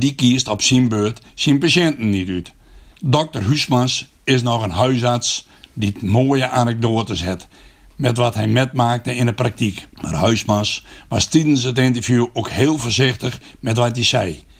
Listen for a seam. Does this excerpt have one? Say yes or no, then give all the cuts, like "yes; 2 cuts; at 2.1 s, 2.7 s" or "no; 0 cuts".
yes; 2 cuts; at 2.9 s, 9.9 s